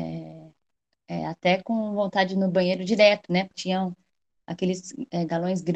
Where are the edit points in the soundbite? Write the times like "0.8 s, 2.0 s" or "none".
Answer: 3.5 s